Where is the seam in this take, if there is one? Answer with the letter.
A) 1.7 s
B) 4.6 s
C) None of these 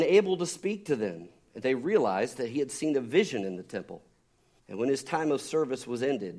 B